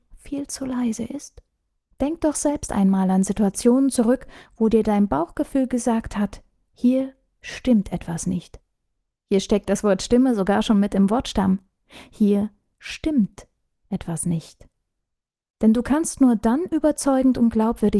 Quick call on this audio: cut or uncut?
uncut